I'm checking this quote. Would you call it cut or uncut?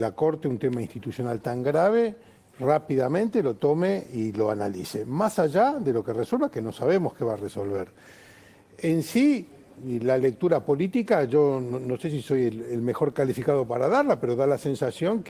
uncut